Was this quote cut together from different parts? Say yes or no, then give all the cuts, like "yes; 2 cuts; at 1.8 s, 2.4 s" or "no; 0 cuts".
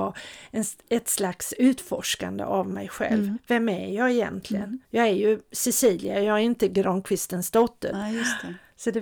yes; 2 cuts; at 4.8 s, 7.9 s